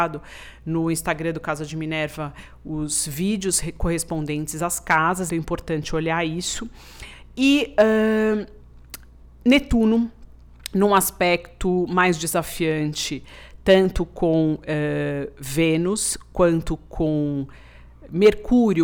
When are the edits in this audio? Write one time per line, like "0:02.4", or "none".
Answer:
0:05.3